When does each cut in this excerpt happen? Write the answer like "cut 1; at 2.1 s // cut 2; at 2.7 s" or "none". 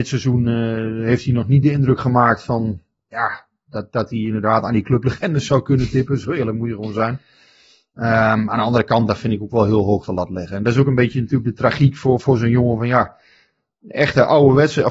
none